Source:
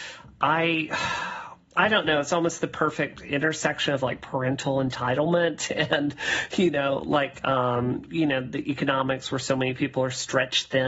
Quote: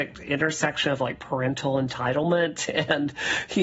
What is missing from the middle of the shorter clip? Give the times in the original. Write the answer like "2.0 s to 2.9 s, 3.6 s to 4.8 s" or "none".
none